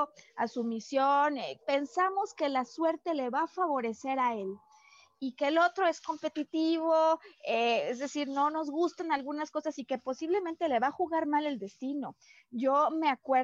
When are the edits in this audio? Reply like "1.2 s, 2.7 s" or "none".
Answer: 1.6 s

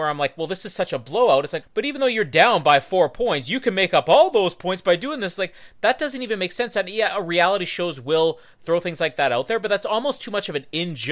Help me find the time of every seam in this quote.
1.6 s

